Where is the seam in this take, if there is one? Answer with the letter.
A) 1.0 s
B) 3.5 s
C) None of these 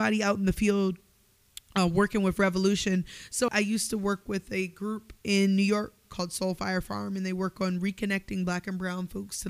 B